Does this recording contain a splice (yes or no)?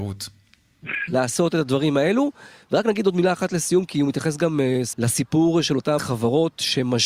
yes